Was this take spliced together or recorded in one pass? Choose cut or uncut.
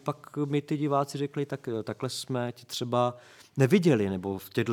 uncut